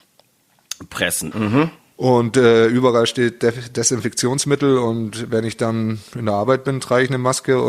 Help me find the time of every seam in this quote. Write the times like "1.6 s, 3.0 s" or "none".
1.3 s

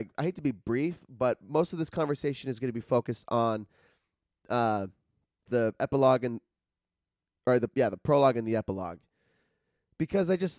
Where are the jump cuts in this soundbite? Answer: none

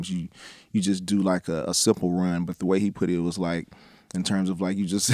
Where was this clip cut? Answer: none

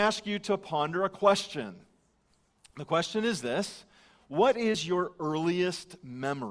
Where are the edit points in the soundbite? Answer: none

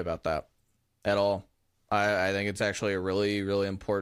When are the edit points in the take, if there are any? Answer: none

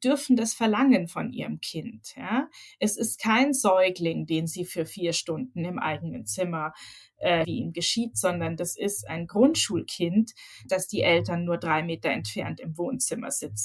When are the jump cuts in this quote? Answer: 7.4 s, 10.7 s

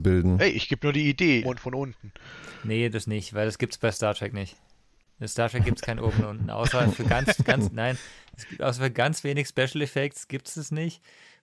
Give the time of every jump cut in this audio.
1.4 s

